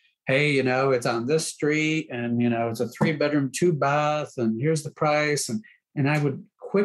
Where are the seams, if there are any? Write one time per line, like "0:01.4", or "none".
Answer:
none